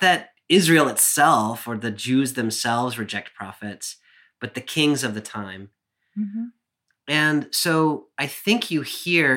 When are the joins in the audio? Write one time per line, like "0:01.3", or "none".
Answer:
none

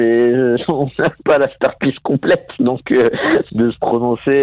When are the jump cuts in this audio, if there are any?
0:03.5

